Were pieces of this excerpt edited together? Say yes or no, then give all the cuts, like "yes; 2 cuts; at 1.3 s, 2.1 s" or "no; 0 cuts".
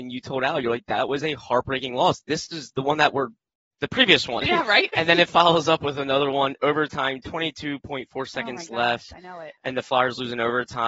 no; 0 cuts